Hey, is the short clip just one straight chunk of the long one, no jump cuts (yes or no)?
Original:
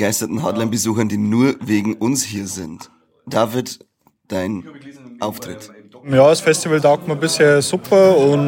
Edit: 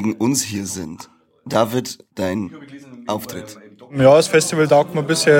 no